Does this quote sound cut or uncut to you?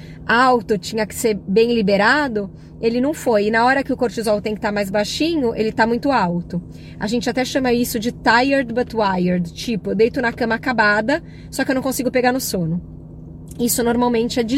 uncut